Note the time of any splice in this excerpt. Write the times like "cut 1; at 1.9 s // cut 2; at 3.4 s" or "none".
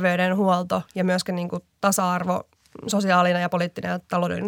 none